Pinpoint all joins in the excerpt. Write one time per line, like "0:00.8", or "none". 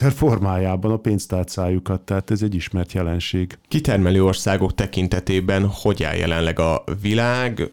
none